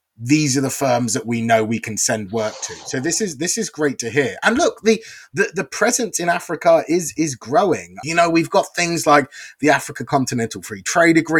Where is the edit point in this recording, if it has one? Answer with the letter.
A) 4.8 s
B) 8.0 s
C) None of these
B